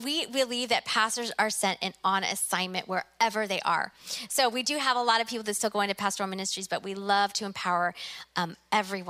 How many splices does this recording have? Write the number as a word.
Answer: zero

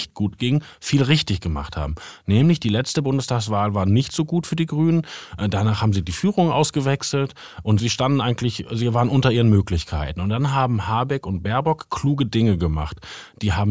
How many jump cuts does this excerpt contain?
zero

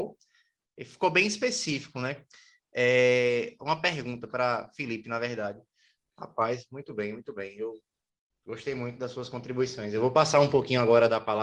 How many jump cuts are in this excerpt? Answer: one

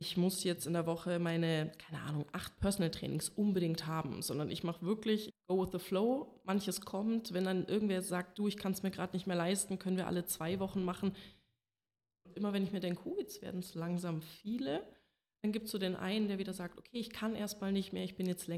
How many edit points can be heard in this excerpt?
two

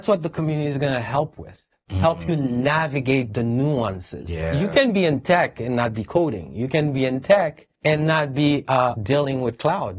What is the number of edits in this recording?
two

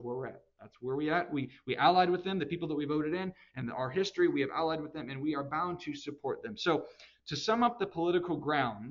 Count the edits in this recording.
zero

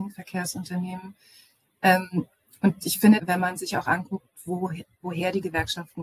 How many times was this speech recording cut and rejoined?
one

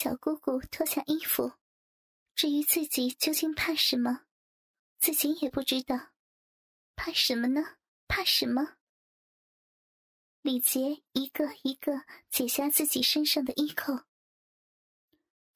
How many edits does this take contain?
two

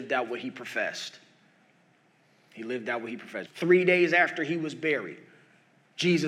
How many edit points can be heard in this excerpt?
one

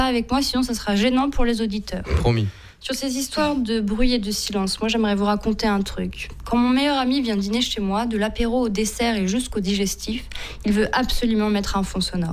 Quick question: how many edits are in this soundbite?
zero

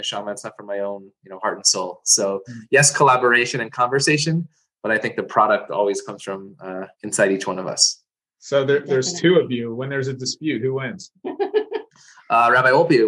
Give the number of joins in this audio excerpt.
one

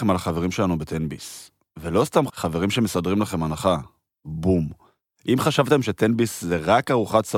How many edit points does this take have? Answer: one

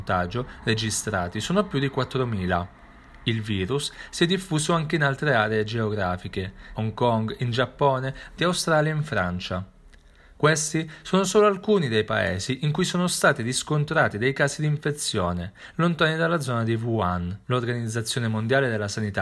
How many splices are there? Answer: three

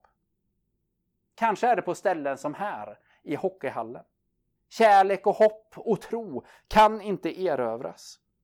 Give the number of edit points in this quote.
one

